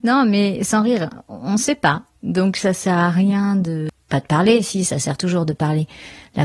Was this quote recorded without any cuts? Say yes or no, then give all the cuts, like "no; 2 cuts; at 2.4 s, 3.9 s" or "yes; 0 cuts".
yes; 0 cuts